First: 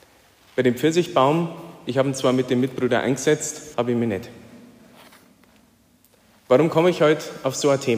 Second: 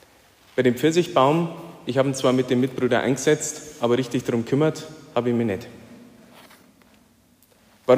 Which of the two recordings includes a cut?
first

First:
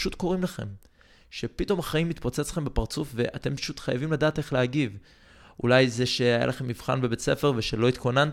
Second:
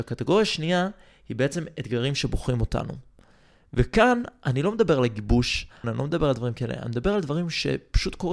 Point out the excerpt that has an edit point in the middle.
second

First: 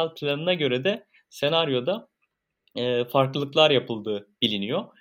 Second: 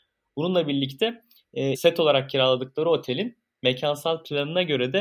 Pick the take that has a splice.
second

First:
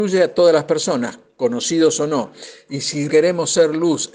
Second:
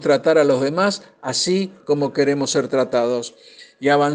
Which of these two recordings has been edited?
first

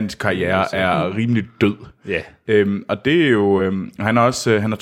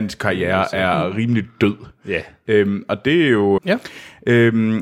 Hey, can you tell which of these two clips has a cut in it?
second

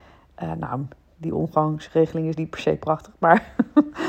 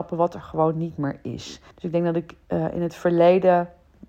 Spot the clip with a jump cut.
second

